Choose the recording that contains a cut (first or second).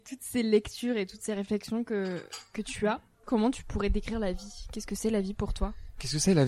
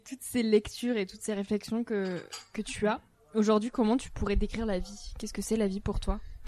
first